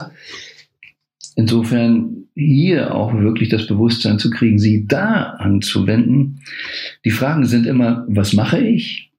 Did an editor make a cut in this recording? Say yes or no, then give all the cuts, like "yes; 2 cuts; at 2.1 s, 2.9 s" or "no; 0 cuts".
no; 0 cuts